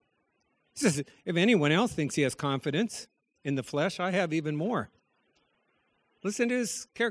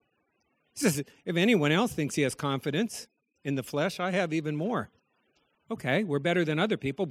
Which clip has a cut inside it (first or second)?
second